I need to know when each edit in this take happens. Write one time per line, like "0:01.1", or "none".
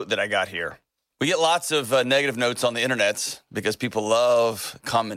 none